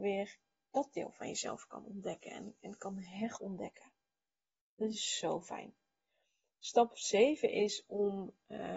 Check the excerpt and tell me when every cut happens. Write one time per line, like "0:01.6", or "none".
none